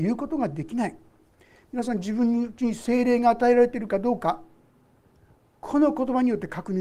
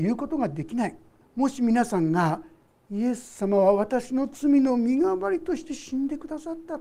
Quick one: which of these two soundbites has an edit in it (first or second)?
second